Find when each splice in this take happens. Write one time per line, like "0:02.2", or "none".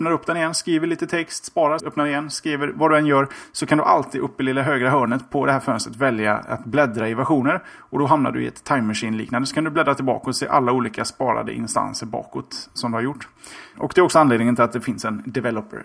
0:01.8
0:13.7